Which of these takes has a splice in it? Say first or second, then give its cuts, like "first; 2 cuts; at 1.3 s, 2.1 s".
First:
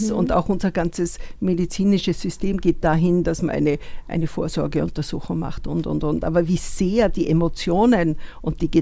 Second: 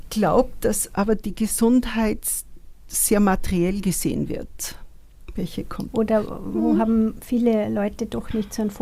second; 1 cut; at 5.3 s